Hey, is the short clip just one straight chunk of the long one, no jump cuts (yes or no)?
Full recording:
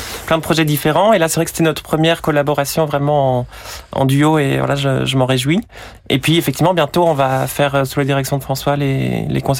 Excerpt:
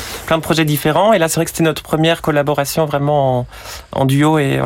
yes